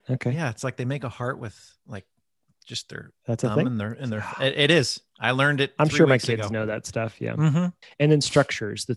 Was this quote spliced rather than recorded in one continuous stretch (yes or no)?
yes